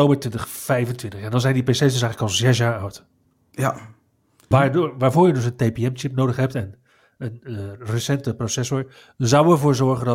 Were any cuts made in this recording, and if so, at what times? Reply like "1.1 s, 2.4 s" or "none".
4.5 s